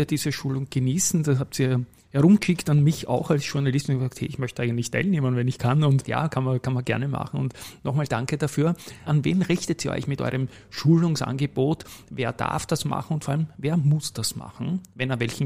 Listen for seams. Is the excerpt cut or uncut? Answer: cut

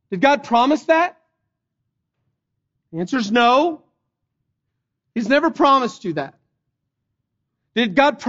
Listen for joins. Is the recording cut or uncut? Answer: uncut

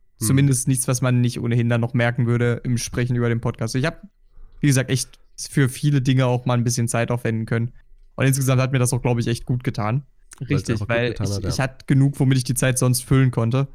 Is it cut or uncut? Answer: cut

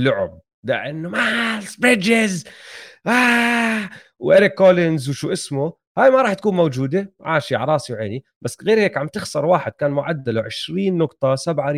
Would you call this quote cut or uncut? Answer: uncut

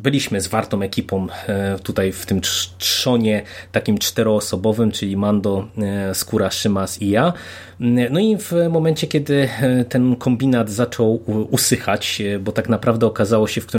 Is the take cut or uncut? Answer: cut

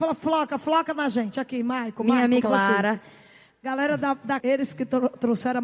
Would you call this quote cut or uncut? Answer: cut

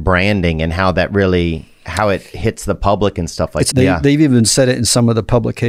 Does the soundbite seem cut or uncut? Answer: cut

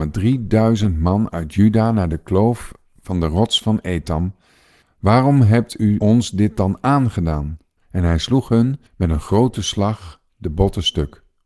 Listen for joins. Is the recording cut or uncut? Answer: cut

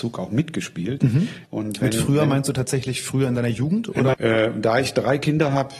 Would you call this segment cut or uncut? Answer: cut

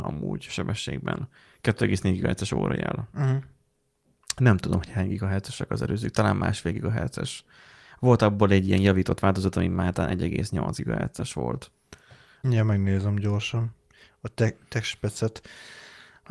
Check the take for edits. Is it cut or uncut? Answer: cut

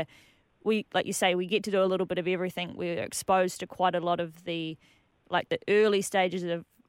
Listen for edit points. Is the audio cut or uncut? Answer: uncut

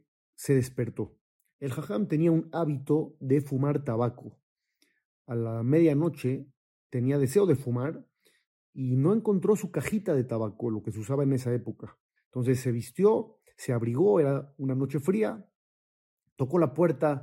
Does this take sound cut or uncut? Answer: cut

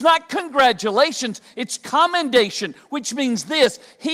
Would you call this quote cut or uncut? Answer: uncut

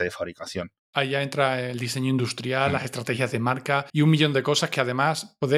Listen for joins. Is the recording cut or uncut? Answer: cut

